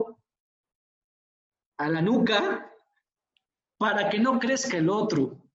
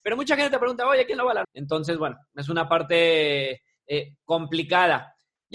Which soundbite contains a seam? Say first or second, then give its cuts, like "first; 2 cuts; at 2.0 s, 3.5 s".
second; 1 cut; at 1.4 s